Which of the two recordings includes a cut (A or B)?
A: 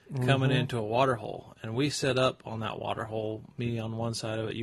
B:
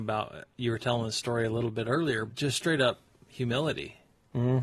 B